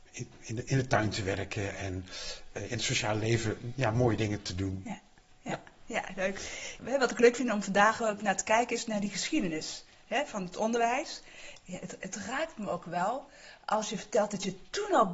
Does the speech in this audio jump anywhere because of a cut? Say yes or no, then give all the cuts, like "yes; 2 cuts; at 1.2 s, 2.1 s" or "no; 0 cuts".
no; 0 cuts